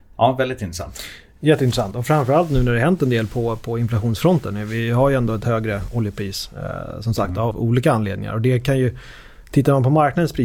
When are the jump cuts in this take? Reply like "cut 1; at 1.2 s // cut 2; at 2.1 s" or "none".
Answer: cut 1; at 7.5 s